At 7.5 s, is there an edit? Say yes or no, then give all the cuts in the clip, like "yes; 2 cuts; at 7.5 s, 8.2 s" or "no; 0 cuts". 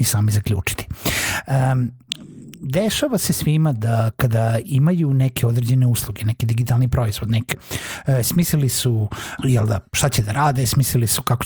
yes; 2 cuts; at 7.5 s, 9.4 s